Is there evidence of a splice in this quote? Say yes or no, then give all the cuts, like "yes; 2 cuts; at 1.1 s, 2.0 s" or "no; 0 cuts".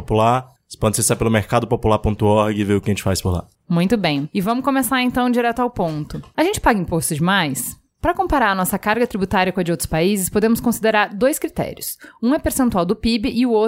no; 0 cuts